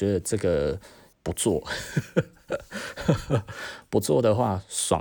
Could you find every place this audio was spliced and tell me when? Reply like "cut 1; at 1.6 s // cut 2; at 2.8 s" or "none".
cut 1; at 1.1 s